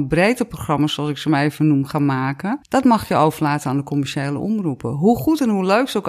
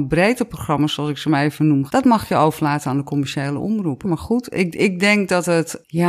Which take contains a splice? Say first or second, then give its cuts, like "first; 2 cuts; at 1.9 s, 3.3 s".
second; 2 cuts; at 1.9 s, 4.0 s